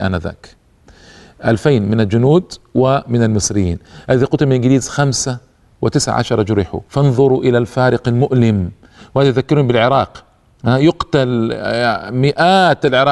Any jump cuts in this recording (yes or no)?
yes